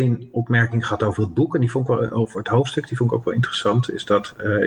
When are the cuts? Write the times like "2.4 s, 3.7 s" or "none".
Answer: none

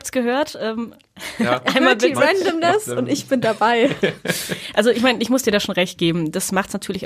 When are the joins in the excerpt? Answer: none

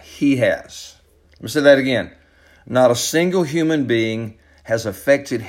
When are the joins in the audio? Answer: none

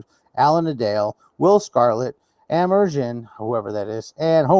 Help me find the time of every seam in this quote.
none

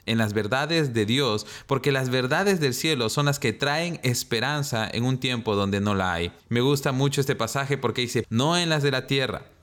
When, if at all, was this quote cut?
6.4 s, 8.2 s

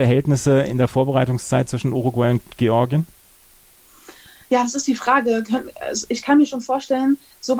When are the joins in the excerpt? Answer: none

